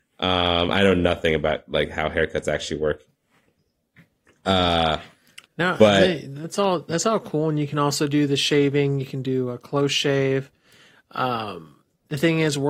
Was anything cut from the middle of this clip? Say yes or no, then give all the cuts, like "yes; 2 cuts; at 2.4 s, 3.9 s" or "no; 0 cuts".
no; 0 cuts